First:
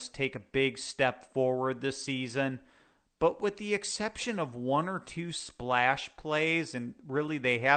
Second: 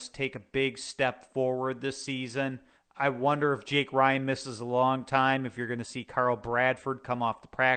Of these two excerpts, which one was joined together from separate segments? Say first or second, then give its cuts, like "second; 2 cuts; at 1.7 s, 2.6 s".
second; 1 cut; at 2.8 s